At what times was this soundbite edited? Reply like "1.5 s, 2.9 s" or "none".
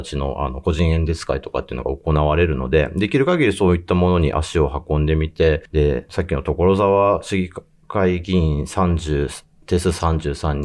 6.1 s